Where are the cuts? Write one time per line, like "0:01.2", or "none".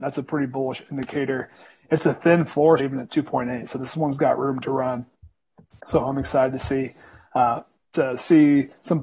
0:02.8
0:07.8